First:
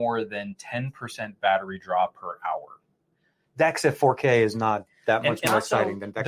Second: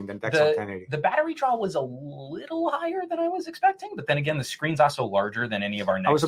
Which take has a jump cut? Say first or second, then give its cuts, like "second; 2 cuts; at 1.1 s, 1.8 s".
first; 1 cut; at 3.5 s